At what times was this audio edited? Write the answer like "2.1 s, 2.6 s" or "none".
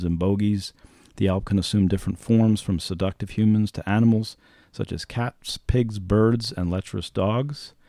none